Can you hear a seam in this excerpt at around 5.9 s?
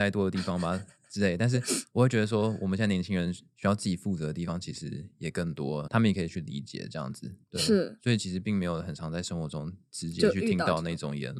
yes; 1 cut; at 5.9 s

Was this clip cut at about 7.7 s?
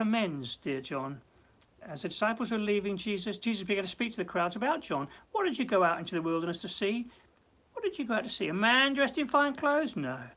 yes; 1 cut; at 7.7 s

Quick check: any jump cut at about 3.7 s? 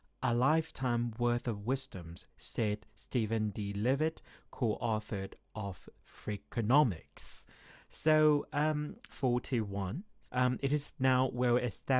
no; 2 cuts; at 9.1 s, 10.3 s

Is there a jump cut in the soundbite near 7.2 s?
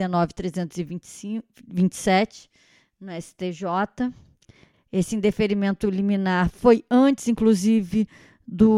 no; 1 cut; at 4.7 s

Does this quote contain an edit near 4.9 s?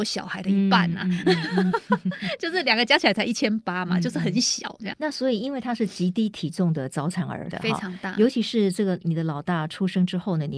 yes; 2 cuts; at 4.9 s, 7.5 s

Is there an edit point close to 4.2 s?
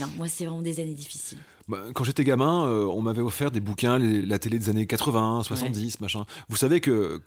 no; 0 cuts

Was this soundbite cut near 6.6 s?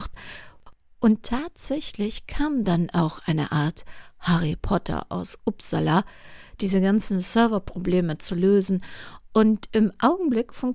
yes; 1 cut; at 6.6 s

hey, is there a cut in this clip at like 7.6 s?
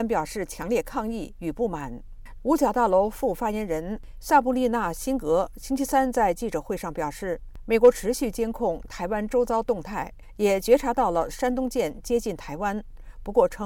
no; 1 cut; at 2.4 s

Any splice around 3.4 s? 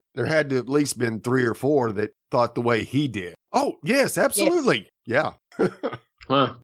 yes; 1 cut; at 3.4 s

